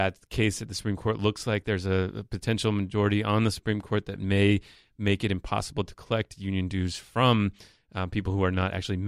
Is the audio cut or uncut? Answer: uncut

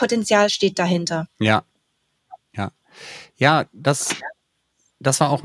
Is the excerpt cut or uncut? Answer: uncut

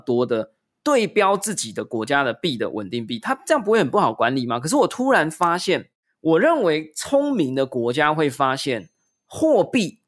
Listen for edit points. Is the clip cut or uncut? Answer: uncut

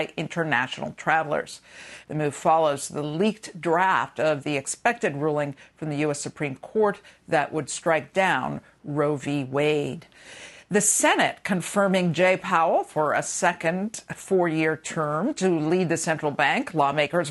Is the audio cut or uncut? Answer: cut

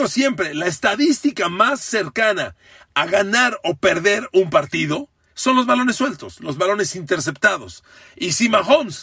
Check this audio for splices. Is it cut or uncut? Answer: uncut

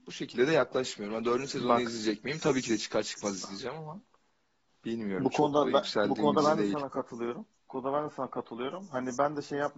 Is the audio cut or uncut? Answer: uncut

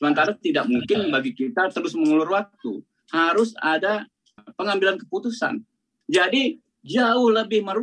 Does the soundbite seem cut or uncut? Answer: cut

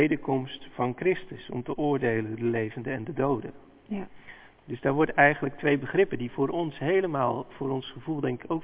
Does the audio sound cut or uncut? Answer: uncut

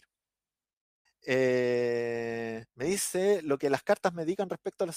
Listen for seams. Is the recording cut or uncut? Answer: cut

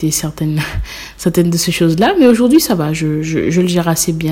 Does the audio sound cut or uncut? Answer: uncut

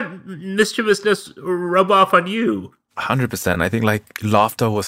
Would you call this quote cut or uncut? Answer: uncut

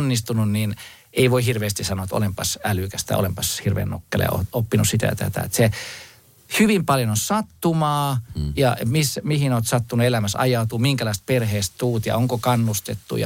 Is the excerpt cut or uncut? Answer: uncut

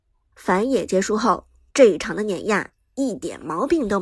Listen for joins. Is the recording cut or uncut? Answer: cut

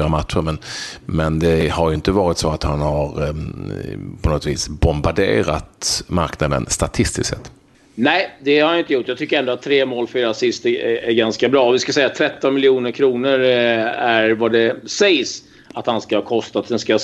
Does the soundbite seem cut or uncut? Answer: uncut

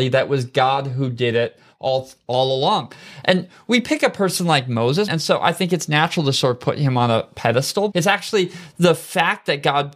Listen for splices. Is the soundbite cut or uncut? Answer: cut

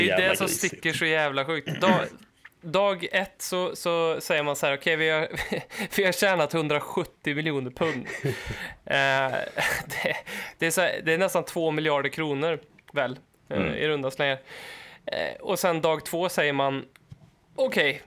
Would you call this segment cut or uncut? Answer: uncut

